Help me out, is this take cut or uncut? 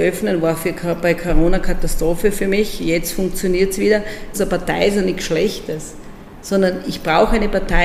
cut